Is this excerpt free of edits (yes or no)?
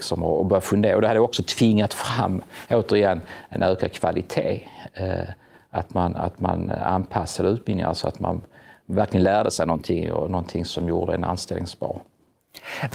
yes